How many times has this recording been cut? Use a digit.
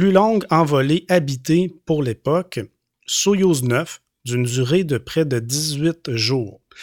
0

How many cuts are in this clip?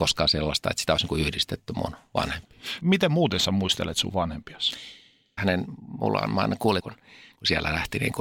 3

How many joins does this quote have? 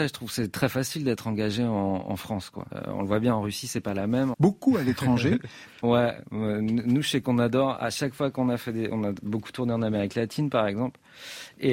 3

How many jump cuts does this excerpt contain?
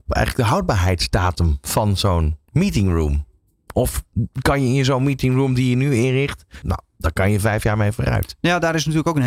1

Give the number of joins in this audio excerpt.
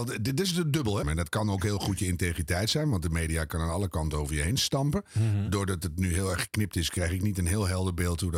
1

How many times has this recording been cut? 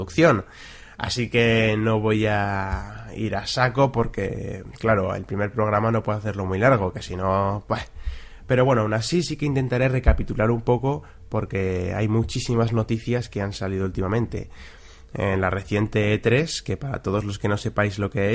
0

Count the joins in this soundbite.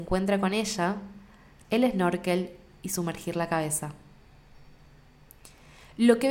1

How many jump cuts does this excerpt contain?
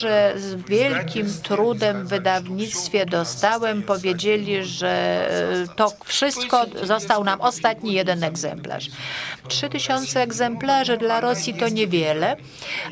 1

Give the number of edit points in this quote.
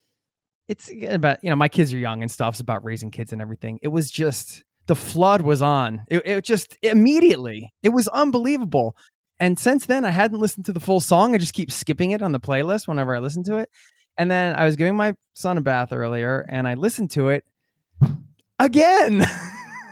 0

